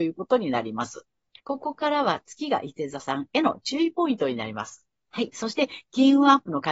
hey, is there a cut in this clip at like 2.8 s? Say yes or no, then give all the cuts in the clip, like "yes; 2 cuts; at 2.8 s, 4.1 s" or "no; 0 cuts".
no; 2 cuts; at 1.4 s, 5.0 s